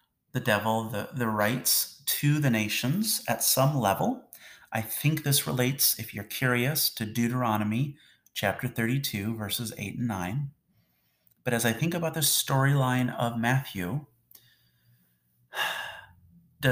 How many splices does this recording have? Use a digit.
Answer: 0